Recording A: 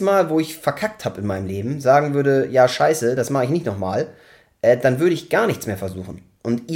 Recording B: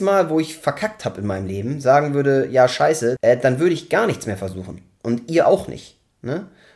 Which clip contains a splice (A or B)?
B